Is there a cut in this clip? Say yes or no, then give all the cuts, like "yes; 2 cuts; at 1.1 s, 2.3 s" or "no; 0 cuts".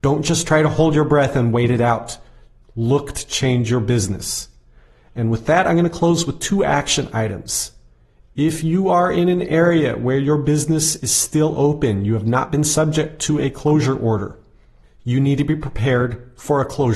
no; 0 cuts